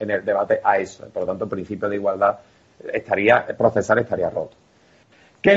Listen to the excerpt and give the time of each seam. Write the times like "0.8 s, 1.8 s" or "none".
none

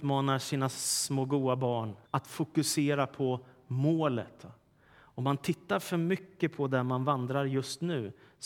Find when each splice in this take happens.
2.1 s

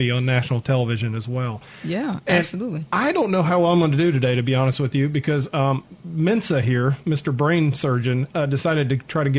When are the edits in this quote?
none

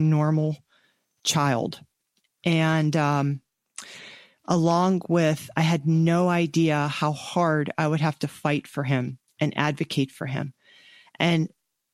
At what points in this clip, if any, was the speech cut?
none

